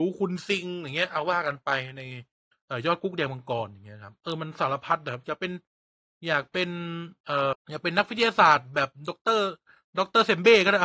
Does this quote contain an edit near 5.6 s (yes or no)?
no